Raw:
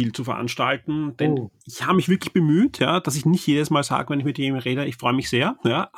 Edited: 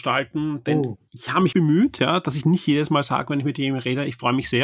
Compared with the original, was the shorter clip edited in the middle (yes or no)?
yes